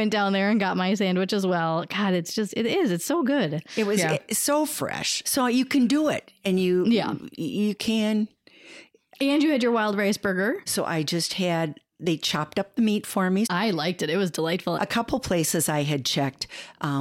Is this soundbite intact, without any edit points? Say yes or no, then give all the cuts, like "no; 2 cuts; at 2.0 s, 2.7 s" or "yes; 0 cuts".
no; 3 cuts; at 10.7 s, 13.5 s, 14.8 s